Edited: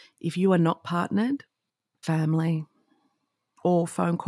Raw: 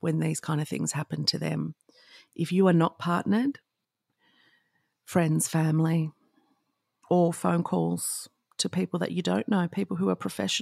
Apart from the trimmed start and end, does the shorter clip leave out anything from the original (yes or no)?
yes